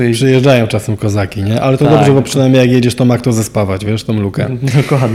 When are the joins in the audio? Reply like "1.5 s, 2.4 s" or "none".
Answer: none